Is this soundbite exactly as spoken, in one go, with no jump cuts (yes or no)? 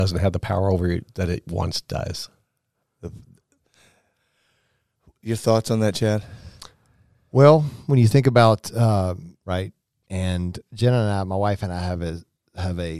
no